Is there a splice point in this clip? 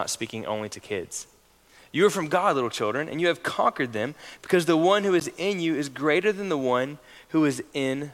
no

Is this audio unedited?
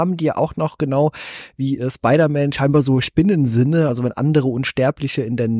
yes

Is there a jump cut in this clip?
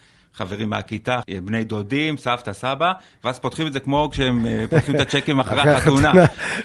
yes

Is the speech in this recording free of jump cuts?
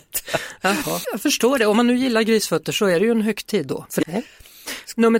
no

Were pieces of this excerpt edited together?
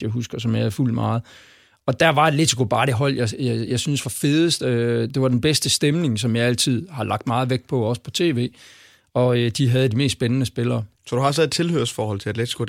no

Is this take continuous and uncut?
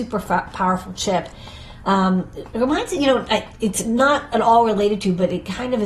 yes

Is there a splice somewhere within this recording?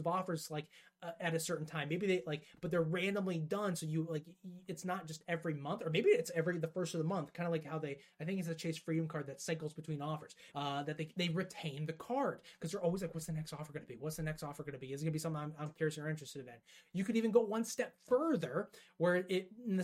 yes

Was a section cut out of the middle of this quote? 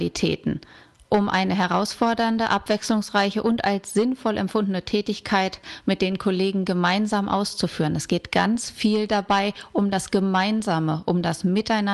no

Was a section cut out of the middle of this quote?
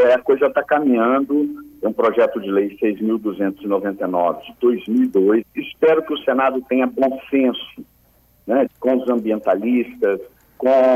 yes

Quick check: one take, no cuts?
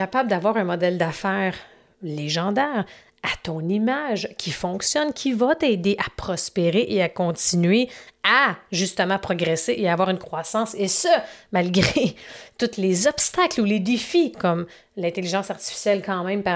no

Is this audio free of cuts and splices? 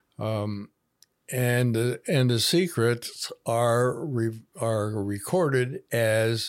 yes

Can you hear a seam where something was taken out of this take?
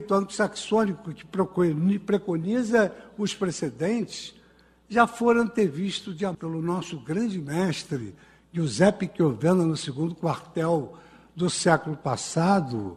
yes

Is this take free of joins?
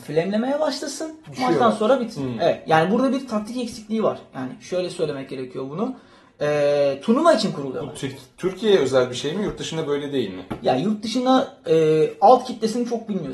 no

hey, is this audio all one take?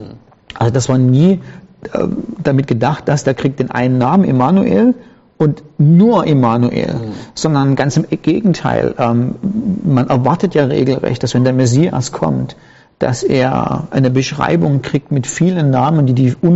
yes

